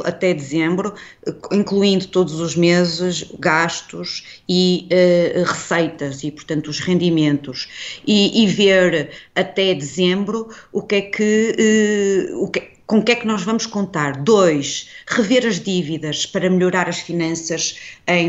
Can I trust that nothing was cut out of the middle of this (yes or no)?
yes